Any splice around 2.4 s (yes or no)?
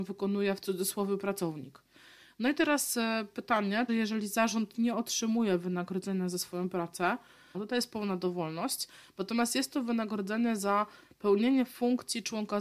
no